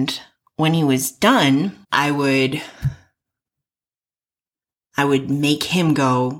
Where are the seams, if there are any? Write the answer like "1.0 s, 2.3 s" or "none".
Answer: 1.8 s